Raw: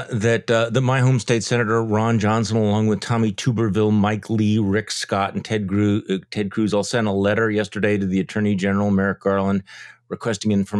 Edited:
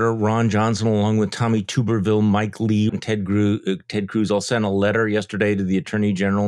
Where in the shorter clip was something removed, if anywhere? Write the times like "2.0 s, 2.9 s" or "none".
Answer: 2.9 s